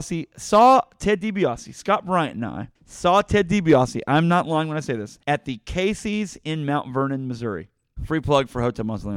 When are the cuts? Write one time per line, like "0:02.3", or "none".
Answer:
0:02.8
0:05.2
0:08.0